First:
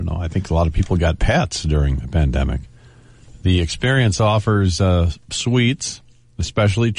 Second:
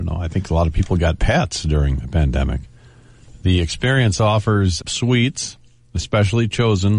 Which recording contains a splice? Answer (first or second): second